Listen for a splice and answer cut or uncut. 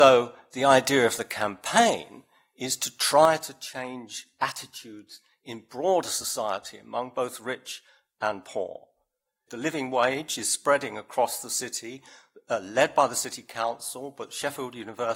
cut